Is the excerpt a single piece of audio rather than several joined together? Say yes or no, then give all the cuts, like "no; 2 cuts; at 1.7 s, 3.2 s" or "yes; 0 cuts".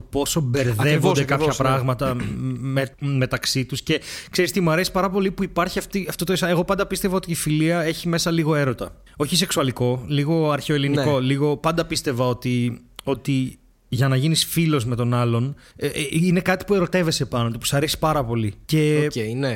yes; 0 cuts